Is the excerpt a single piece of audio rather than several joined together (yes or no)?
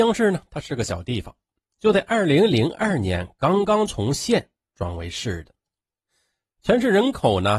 yes